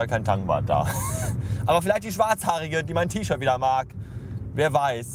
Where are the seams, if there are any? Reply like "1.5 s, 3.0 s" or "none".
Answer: none